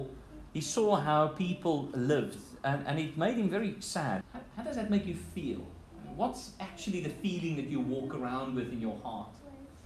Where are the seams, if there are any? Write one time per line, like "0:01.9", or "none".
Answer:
0:04.2